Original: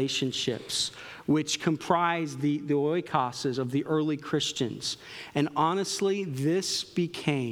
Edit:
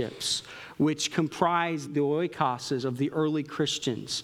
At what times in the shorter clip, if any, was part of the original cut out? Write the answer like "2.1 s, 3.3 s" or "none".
1.9 s